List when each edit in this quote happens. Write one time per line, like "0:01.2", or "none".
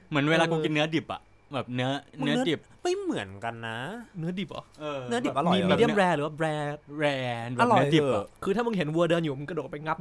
0:02.1